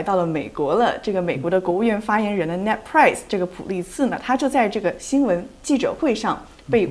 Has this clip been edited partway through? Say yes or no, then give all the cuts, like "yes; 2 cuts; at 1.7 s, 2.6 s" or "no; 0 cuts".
no; 0 cuts